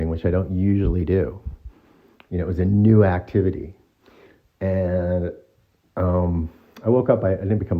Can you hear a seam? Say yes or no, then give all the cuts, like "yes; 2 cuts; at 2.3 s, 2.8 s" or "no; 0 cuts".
no; 0 cuts